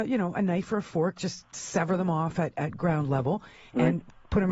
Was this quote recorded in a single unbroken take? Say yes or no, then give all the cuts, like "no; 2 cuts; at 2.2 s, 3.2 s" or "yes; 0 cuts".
yes; 0 cuts